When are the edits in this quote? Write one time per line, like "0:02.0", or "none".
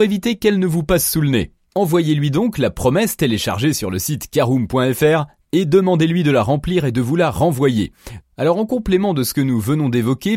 0:08.2